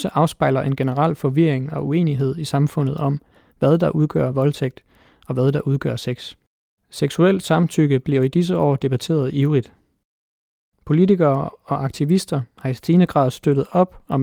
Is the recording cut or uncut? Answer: uncut